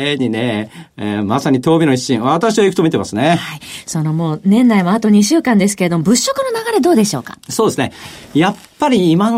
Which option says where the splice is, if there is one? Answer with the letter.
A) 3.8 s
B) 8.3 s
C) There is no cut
C